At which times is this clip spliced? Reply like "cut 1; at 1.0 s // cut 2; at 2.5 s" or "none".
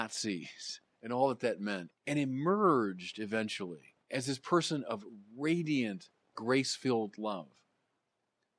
cut 1; at 1.9 s // cut 2; at 4.0 s